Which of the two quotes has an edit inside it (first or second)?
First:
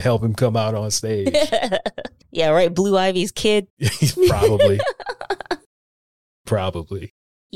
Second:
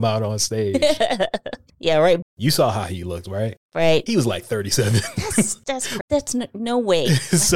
second